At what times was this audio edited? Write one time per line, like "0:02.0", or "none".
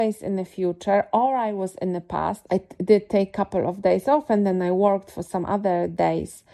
0:02.5